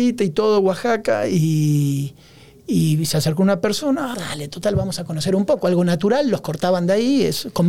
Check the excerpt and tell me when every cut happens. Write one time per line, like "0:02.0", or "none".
0:04.1